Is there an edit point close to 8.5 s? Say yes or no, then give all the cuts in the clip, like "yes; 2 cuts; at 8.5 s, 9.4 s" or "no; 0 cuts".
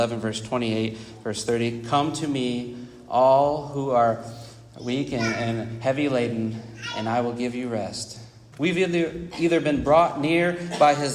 yes; 1 cut; at 8.5 s